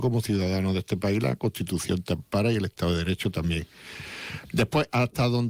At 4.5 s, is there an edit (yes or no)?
no